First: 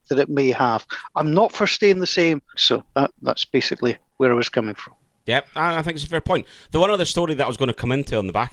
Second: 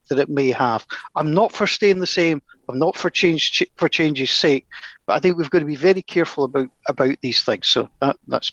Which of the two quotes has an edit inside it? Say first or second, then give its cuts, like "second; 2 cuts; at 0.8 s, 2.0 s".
first; 1 cut; at 2.5 s